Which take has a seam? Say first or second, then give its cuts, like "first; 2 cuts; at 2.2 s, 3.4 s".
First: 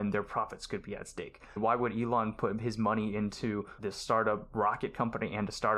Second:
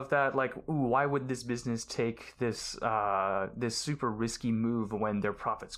first; 2 cuts; at 1.6 s, 3.8 s